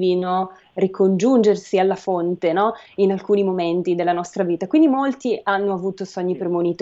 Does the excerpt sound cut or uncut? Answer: uncut